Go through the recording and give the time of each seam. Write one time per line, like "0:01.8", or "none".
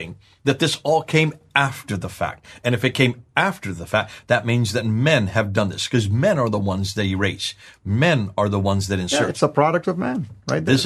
none